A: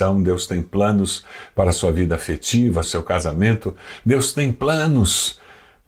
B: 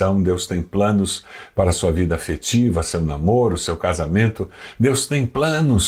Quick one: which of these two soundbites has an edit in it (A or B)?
A